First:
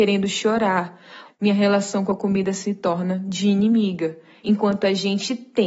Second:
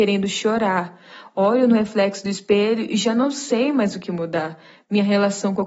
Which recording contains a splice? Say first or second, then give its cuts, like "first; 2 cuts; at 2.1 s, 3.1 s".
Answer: first; 2 cuts; at 1.2 s, 4.4 s